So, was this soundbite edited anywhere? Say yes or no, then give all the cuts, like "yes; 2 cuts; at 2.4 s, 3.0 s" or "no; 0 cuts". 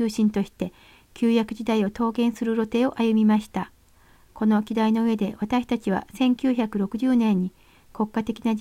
no; 0 cuts